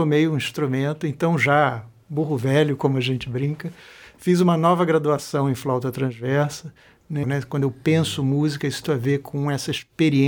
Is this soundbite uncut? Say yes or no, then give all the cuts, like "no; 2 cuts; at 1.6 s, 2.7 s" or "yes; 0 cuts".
no; 2 cuts; at 7.2 s, 8.8 s